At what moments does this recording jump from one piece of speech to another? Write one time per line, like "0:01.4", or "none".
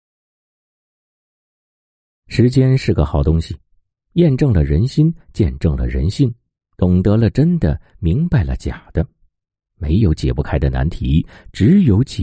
none